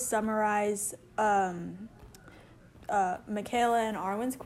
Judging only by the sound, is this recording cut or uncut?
uncut